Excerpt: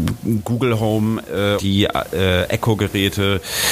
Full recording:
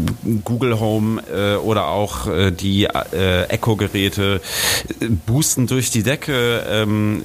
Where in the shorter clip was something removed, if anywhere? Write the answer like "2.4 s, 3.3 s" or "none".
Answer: 1.6 s